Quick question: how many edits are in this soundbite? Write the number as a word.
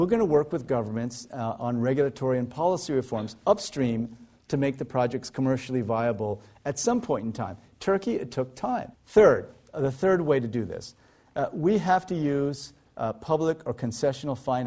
one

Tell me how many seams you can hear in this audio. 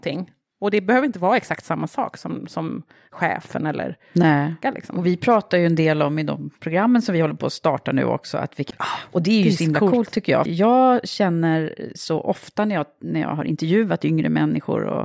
three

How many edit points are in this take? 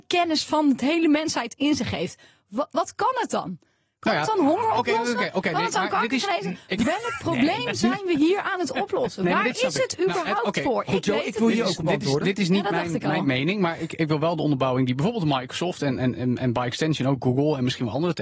zero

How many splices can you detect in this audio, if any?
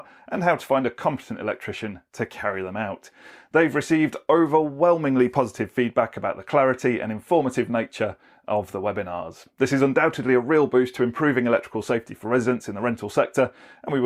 zero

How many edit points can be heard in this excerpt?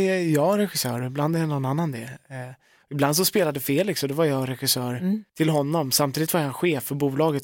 one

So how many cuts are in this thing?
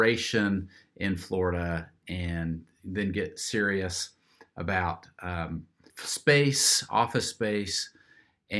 one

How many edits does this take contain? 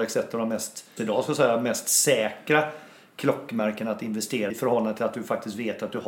two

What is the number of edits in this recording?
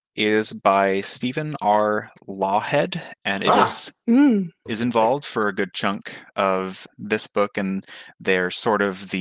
one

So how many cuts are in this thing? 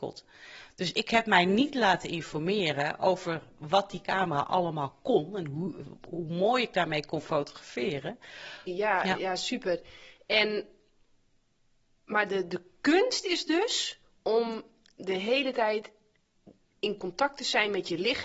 one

